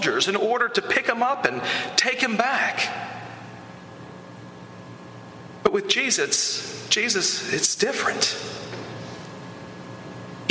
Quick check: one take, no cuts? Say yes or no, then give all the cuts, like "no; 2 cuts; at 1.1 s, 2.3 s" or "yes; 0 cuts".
yes; 0 cuts